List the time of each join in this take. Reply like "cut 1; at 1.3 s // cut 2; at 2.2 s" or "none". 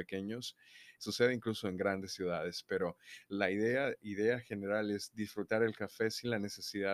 cut 1; at 1.0 s